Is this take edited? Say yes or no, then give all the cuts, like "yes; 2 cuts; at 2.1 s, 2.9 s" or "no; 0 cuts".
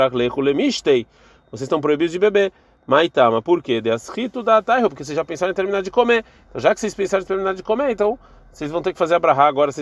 no; 0 cuts